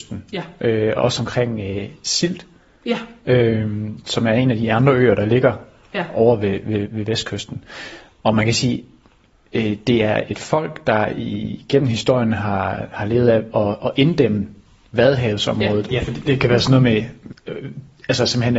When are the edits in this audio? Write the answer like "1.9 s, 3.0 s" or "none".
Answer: 15.9 s, 17.3 s